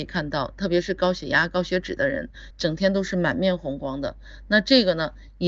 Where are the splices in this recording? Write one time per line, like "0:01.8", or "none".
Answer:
0:02.5